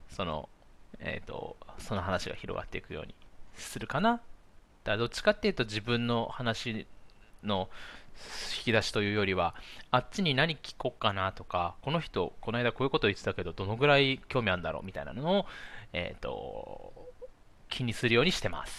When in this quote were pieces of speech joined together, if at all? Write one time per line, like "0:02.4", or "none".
0:00.9